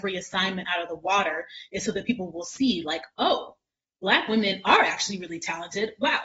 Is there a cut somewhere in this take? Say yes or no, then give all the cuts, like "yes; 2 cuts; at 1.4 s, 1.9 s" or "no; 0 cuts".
no; 0 cuts